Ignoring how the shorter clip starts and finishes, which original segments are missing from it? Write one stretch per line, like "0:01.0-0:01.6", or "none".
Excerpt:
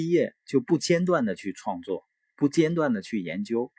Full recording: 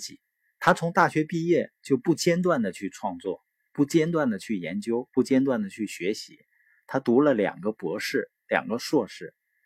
none